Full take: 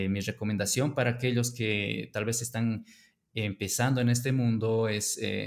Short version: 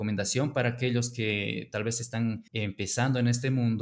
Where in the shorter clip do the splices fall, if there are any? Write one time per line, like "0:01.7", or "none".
0:02.5